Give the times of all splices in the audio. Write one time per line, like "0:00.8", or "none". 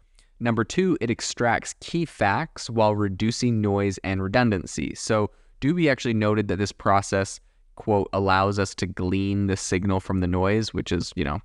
none